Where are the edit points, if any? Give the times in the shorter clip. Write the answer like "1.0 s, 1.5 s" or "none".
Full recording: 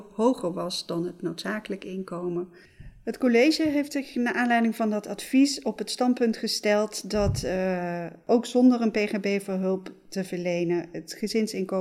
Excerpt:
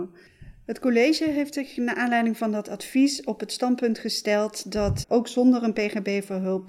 5.0 s

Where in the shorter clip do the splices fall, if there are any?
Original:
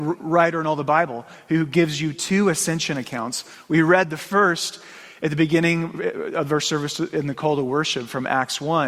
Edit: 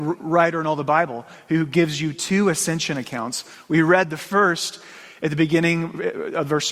none

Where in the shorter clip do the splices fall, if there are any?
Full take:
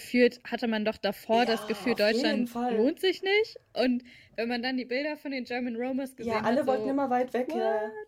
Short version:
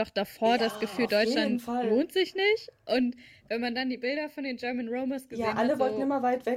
none

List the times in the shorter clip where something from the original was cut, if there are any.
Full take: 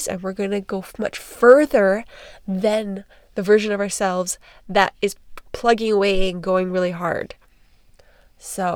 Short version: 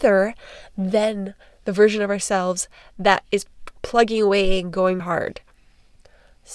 5.0 s

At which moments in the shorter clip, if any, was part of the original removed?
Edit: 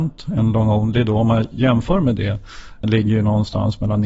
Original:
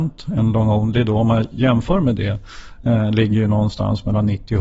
2.8 s

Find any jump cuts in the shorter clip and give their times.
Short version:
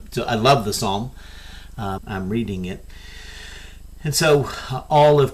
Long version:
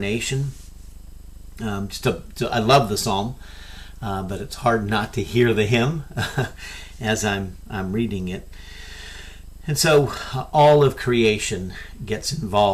2.0 s

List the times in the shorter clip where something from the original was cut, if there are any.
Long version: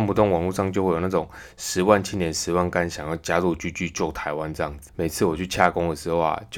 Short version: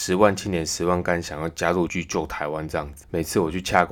1.9 s

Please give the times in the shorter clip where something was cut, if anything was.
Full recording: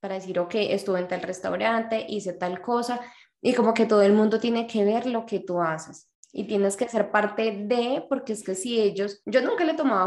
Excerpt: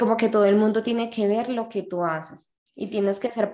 none

